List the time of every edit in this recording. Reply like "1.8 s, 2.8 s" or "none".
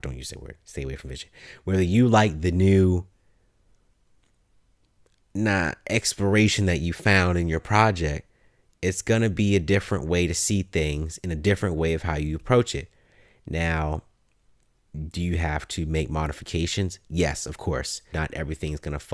18.1 s